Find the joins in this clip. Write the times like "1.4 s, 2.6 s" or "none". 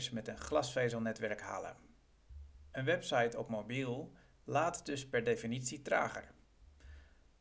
none